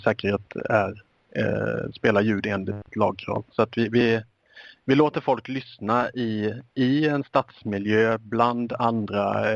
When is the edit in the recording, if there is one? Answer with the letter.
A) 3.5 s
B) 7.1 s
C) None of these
A